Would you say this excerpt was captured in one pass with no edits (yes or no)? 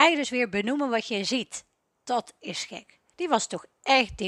no